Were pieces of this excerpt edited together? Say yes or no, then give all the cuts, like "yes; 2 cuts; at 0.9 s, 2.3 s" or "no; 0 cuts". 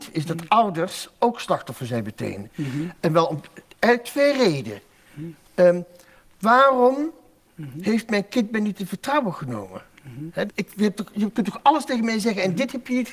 yes; 1 cut; at 10.5 s